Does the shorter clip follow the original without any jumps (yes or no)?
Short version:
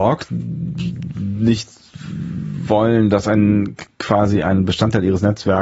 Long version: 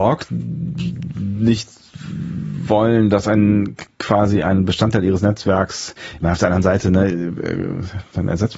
yes